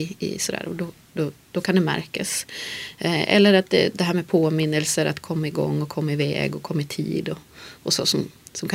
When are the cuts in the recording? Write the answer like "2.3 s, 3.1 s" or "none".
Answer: none